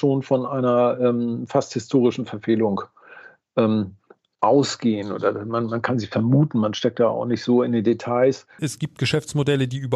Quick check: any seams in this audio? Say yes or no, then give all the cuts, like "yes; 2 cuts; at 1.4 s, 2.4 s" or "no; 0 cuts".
yes; 1 cut; at 8.6 s